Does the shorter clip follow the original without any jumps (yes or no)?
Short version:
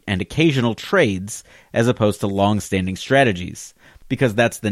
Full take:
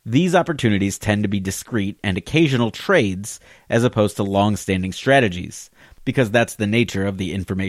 yes